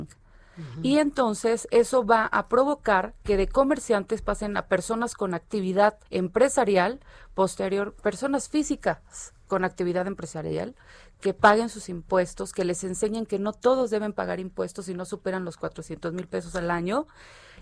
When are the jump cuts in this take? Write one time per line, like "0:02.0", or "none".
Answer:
0:06.1